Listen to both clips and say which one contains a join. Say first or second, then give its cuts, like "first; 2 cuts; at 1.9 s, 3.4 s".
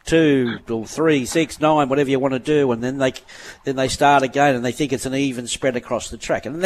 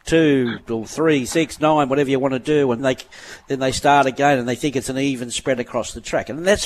second; 1 cut; at 2.8 s